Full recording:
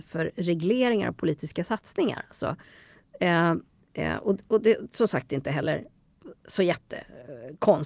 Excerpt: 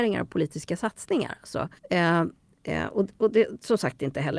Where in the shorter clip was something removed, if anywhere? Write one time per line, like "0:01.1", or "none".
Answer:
0:01.8

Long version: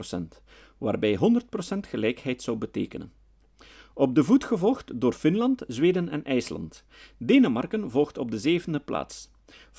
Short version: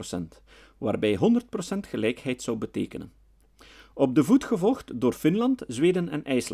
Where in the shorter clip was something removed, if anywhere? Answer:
none

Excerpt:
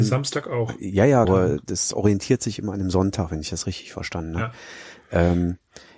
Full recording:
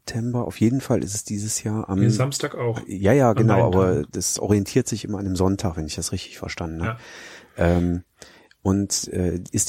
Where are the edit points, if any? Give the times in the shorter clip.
0:01.2

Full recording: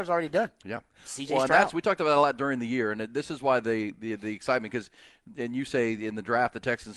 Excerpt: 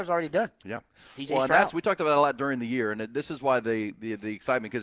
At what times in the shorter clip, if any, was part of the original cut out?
none

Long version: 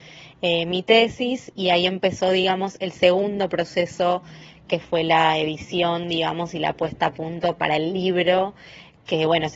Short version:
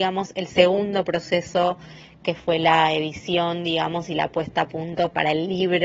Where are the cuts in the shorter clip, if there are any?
none

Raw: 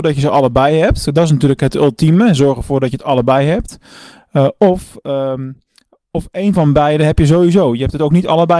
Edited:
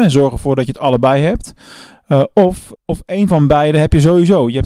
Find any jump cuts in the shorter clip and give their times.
0:02.8

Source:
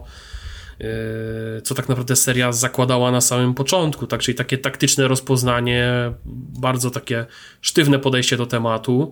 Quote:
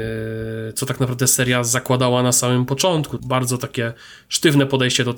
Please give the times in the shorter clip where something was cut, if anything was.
0:03.2

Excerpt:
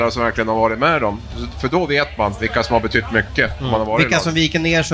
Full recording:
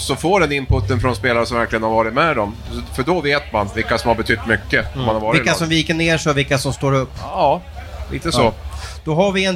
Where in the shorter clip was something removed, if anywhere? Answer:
none

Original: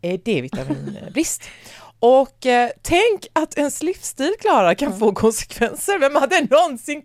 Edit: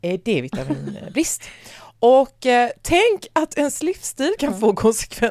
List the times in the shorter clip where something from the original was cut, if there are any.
0:04.4

